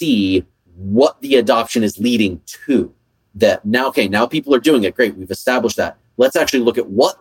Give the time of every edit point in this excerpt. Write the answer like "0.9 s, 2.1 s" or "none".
none